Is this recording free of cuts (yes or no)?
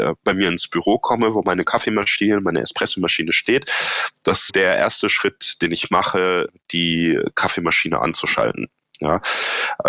no